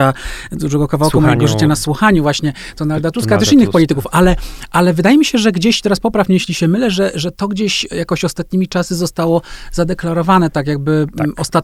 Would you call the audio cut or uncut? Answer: uncut